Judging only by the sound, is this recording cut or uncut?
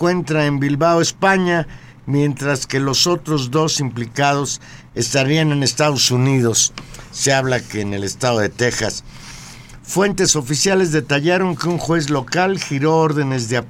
uncut